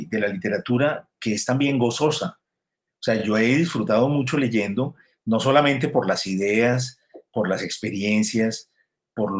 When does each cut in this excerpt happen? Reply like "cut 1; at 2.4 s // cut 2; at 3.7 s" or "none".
none